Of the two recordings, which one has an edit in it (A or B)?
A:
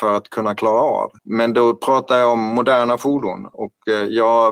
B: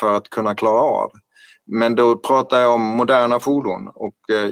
A